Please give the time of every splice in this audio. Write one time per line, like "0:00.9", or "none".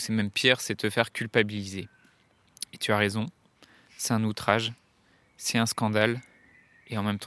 none